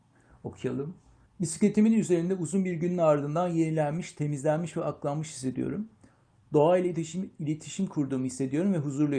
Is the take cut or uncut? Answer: uncut